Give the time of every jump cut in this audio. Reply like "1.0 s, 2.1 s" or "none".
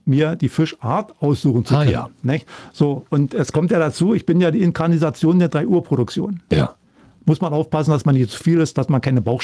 6.5 s